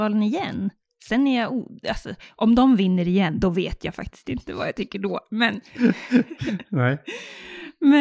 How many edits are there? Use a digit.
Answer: 0